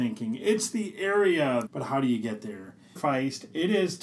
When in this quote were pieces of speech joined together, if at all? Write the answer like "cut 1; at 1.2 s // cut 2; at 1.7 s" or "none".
cut 1; at 1.7 s // cut 2; at 3.0 s